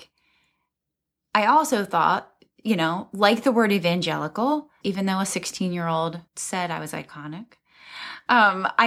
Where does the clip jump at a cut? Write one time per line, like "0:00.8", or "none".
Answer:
0:04.8
0:06.3